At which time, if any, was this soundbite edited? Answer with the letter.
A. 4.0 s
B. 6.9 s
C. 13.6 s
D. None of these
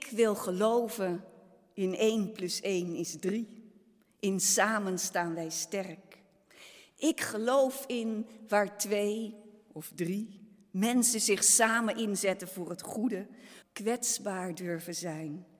C